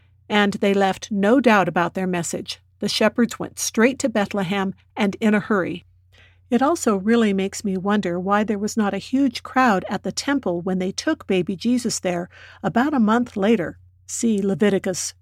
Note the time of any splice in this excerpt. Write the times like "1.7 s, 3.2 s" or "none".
none